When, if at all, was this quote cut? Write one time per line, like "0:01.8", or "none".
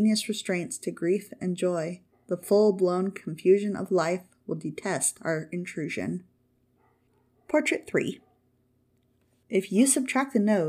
0:02.1